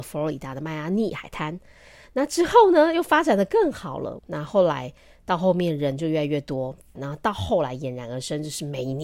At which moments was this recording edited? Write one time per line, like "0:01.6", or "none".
0:04.2
0:06.9